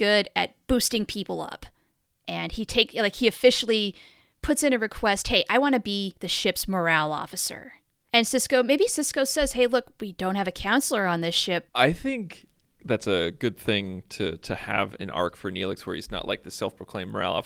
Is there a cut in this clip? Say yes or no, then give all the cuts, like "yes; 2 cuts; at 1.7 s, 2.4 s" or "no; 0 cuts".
yes; 1 cut; at 11.7 s